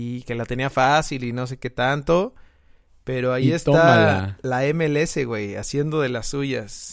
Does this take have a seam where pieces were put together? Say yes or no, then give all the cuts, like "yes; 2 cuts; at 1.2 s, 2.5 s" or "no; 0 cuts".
no; 0 cuts